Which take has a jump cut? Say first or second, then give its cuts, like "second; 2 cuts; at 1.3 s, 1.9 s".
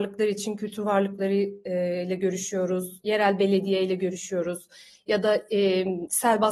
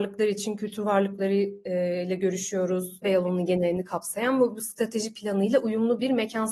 second; 1 cut; at 3.0 s